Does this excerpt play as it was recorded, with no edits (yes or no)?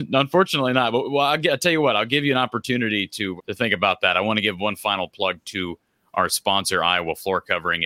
no